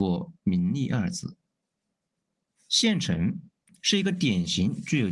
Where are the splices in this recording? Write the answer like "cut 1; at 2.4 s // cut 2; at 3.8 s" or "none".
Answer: cut 1; at 2.5 s